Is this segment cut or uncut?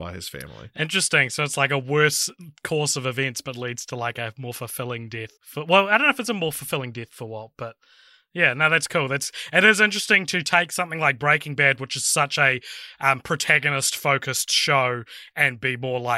cut